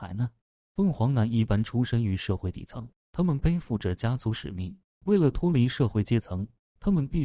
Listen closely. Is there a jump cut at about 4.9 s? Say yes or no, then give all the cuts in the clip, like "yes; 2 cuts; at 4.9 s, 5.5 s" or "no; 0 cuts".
no; 0 cuts